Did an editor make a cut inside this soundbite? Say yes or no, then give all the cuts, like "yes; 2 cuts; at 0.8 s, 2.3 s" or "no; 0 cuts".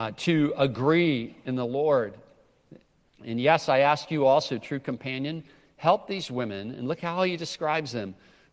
yes; 1 cut; at 3.1 s